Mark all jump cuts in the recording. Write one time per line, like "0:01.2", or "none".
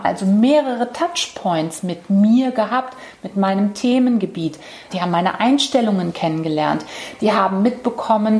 0:04.9